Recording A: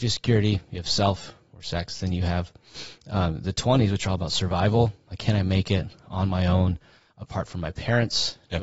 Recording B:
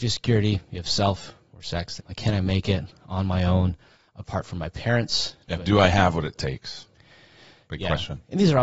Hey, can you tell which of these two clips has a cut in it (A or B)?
B